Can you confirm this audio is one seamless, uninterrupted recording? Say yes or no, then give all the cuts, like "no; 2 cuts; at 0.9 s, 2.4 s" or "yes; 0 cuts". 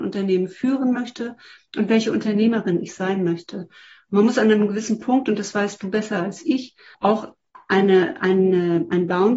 no; 1 cut; at 6.9 s